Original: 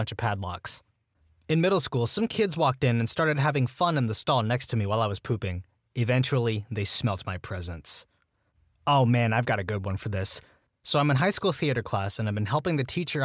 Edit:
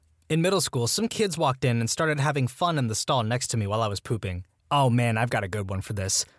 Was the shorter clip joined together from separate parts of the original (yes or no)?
yes